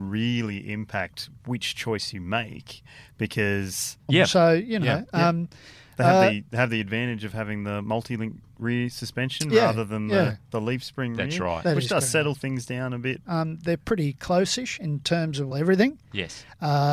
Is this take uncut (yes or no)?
no